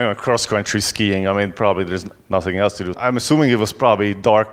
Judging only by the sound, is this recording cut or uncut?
cut